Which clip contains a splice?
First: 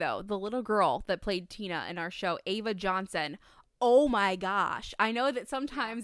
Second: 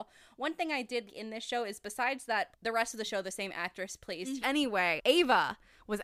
second; 3 cuts; at 1.1 s, 2.5 s, 4.4 s

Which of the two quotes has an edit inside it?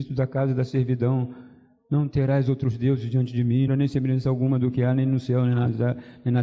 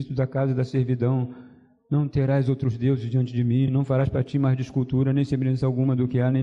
first; 1 cut; at 3.7 s

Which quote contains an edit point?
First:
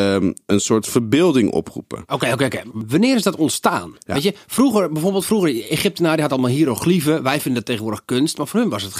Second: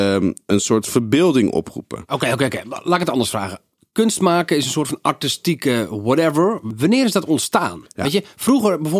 first; 1 cut; at 2.7 s

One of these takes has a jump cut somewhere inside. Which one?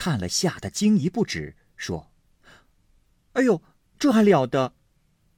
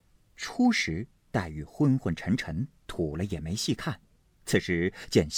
first; 1 cut; at 3.9 s

